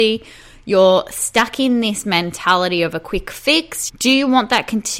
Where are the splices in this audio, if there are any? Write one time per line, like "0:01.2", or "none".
0:03.9